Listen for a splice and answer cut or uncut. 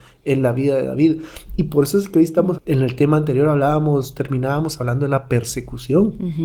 cut